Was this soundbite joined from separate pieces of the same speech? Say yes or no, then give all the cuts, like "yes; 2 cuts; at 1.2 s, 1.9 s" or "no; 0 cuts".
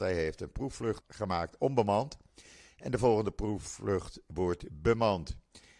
yes; 1 cut; at 1.0 s